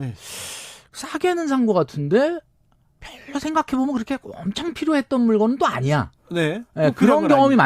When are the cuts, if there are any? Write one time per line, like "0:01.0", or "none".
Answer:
none